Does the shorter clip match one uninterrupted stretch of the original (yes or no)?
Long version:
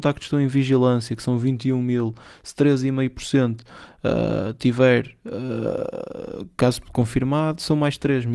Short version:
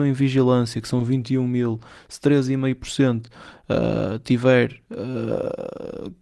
yes